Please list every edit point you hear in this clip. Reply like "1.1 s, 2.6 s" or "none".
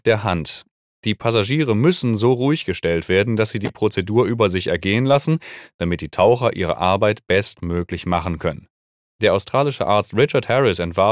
none